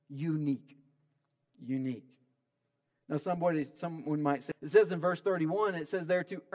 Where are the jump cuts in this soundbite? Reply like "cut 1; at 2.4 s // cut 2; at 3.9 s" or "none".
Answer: cut 1; at 4.5 s